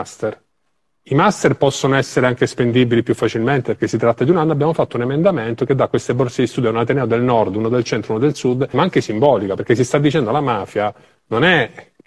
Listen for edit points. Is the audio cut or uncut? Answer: cut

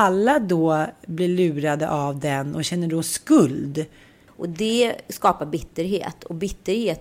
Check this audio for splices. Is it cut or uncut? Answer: cut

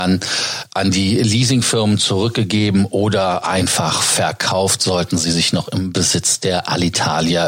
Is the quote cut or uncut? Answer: uncut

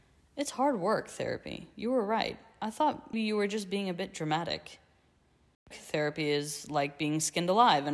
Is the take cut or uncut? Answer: cut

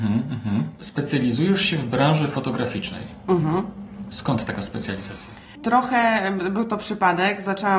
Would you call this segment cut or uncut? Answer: uncut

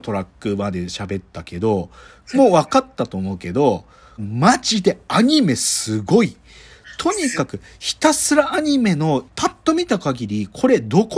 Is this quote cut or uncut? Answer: cut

